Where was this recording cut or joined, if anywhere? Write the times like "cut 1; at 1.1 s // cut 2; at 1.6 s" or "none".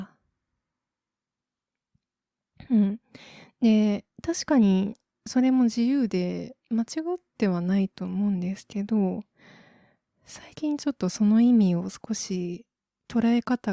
none

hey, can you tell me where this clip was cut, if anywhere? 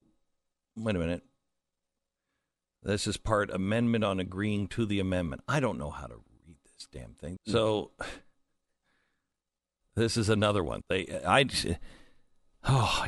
cut 1; at 7.4 s // cut 2; at 10.8 s

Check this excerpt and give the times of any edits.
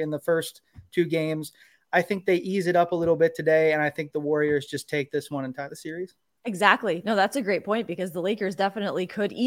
none

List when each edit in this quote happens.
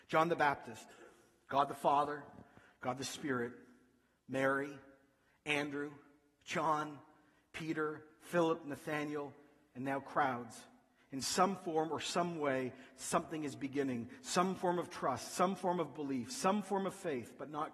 none

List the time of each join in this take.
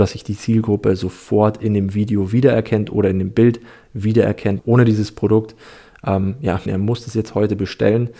cut 1; at 4.6 s // cut 2; at 6.7 s

